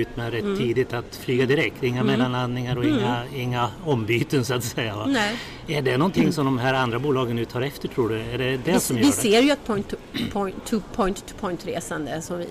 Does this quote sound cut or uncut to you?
uncut